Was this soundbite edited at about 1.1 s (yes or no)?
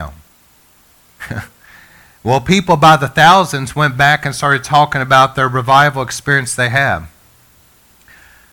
no